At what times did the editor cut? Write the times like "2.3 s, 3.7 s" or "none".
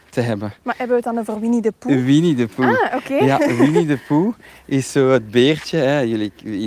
none